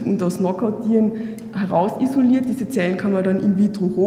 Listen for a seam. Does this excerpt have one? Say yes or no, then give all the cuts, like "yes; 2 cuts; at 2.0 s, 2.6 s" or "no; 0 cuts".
no; 0 cuts